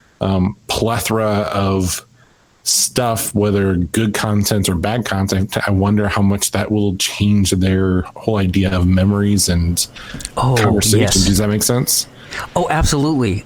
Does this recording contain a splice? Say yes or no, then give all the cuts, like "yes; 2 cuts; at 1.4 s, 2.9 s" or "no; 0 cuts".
no; 0 cuts